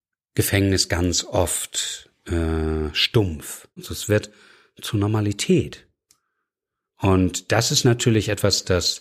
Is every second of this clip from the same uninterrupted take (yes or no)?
no